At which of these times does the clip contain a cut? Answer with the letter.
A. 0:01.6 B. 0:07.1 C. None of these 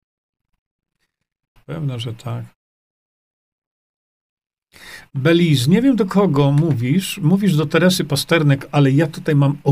A